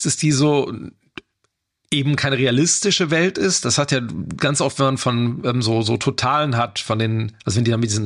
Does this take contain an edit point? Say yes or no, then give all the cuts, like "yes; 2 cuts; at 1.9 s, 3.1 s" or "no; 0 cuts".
no; 0 cuts